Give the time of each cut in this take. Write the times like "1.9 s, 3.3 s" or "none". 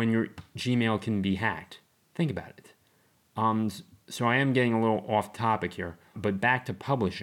6.1 s